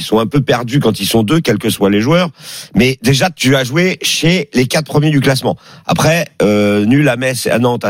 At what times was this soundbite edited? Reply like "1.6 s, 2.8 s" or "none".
2.7 s

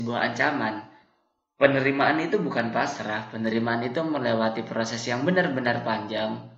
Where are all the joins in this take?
none

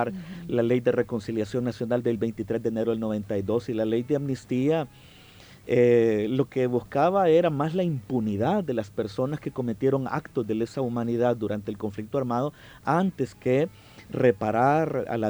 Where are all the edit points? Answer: none

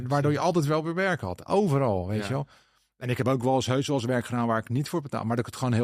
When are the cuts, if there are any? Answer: none

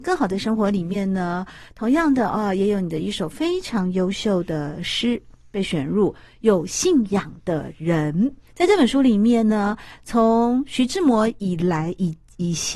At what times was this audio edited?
8.5 s, 9.9 s

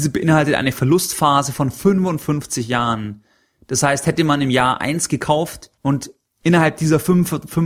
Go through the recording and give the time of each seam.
5.8 s

